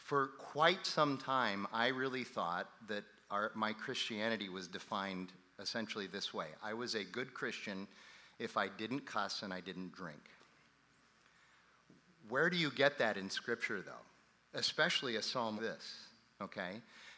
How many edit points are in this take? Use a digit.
1